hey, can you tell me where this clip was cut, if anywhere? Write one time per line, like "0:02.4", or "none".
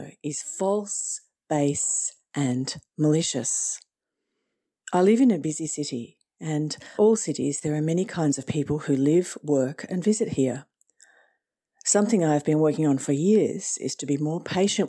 0:07.0